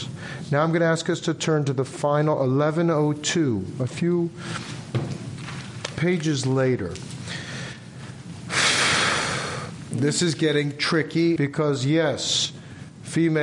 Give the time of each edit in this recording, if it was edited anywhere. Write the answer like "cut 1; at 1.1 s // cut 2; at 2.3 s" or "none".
cut 1; at 5.9 s // cut 2; at 11.4 s